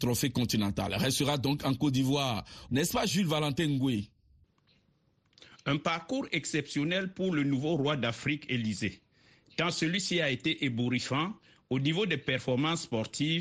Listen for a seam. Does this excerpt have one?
yes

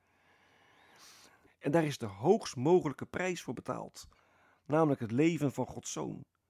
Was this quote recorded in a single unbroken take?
no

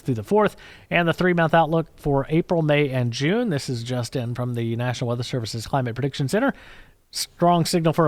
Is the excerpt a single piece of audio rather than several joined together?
yes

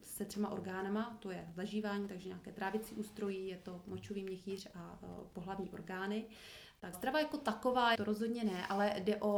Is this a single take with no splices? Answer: no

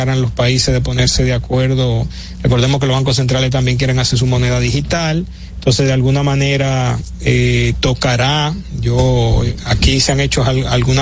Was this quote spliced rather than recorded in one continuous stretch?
no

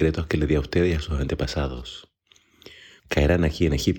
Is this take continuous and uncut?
no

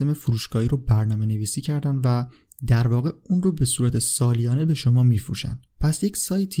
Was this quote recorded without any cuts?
no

